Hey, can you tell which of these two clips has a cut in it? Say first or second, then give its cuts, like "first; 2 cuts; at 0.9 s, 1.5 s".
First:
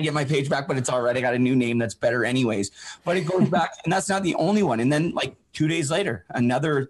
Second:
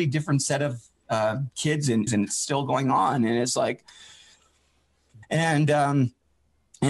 second; 2 cuts; at 2.1 s, 5.2 s